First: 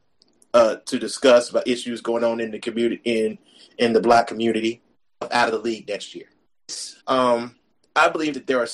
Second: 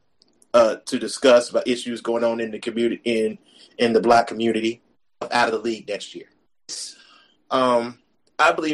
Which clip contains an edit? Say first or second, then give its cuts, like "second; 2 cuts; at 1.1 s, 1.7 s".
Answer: first; 1 cut; at 7.0 s